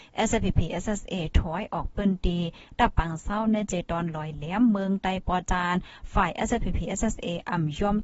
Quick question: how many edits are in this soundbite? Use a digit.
0